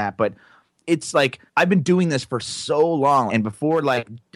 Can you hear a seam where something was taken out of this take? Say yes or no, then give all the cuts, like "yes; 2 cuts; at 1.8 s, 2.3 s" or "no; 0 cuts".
yes; 2 cuts; at 1.5 s, 3.3 s